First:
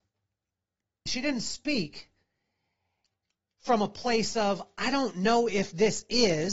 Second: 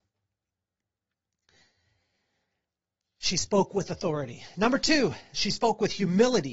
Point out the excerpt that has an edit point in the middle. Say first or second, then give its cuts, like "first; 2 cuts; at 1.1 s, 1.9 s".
first; 1 cut; at 1.1 s